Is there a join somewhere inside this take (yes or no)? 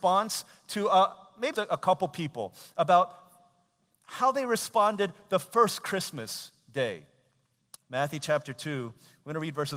yes